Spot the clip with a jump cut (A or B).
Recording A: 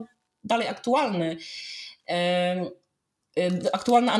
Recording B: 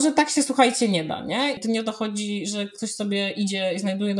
B